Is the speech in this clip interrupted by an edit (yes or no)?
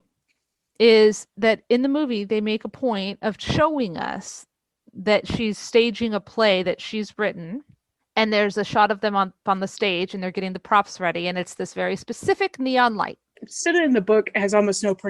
yes